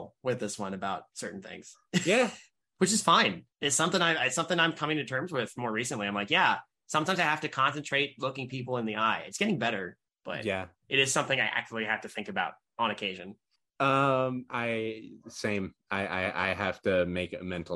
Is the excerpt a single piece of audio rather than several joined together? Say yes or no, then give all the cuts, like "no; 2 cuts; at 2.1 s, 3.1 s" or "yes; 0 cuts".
no; 1 cut; at 3.5 s